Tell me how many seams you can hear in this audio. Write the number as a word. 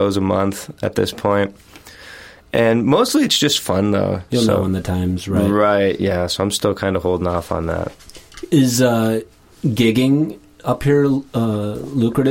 one